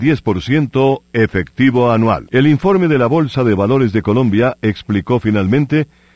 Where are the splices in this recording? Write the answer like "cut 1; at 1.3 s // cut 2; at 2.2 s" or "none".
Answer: cut 1; at 2.2 s

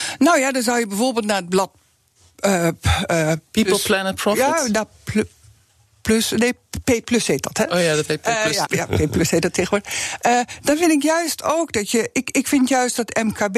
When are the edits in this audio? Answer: cut 1; at 8.6 s

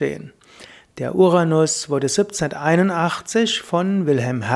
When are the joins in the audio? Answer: none

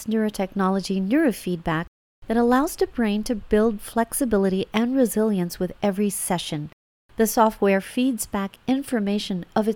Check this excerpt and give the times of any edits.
none

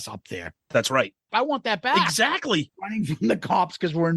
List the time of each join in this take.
cut 1; at 1.3 s // cut 2; at 2.7 s

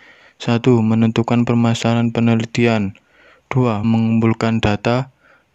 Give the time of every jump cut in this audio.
cut 1; at 3.8 s

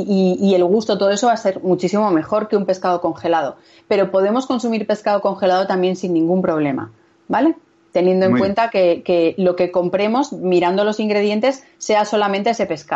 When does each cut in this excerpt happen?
none

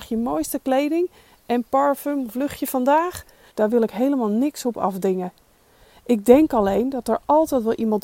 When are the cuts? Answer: cut 1; at 3.5 s

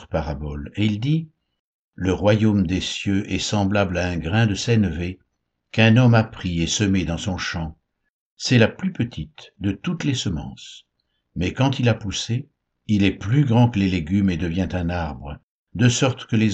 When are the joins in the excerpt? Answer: none

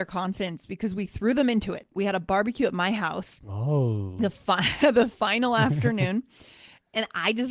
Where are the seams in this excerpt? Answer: cut 1; at 2.0 s

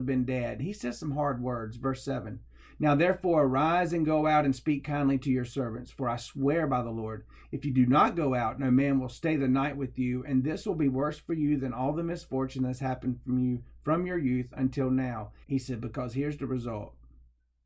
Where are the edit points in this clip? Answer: cut 1; at 15.4 s

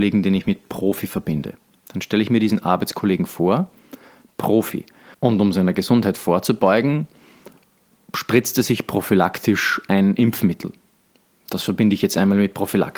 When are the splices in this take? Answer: none

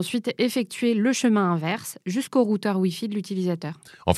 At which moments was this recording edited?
none

